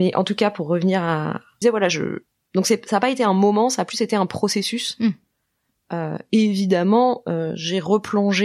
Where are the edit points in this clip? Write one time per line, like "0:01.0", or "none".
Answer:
0:01.6